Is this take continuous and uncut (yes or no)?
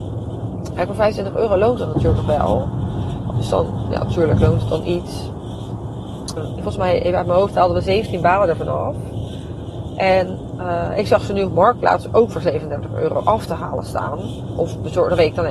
no